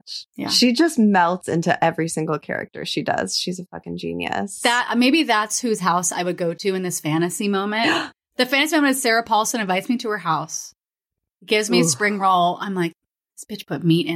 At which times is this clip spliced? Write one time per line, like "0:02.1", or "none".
none